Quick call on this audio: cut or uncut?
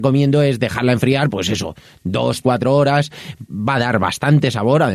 cut